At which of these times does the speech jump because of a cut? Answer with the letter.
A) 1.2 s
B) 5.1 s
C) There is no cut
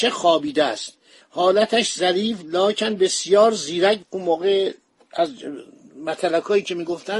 A